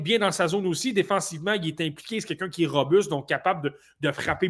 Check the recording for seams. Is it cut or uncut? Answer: uncut